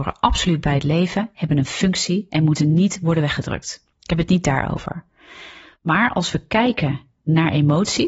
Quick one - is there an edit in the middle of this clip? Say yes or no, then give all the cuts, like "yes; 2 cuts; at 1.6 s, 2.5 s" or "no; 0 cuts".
yes; 1 cut; at 3.9 s